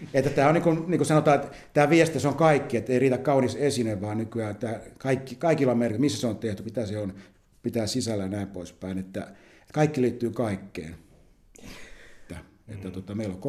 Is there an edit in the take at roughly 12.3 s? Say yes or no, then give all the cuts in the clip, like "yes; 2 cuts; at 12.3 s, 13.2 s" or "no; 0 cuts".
yes; 2 cuts; at 6.6 s, 12.3 s